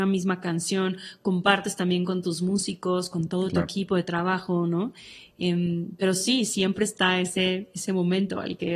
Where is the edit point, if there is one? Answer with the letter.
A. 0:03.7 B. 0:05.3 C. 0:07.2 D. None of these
D